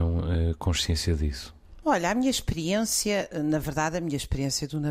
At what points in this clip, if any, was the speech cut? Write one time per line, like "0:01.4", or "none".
0:01.8